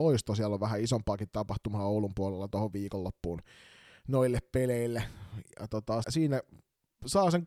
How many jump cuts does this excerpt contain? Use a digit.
1